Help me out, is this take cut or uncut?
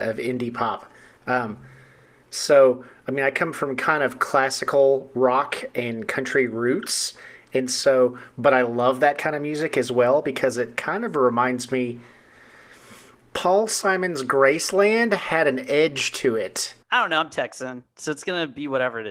cut